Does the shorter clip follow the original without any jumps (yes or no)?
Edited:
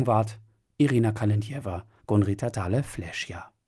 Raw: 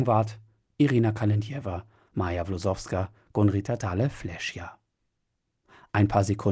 no